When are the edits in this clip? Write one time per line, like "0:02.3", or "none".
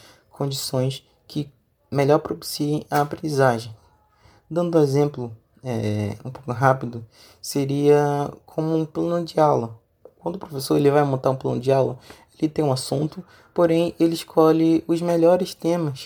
none